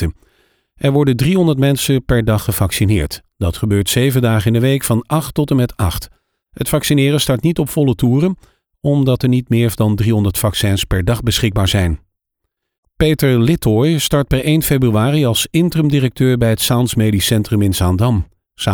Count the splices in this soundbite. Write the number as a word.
zero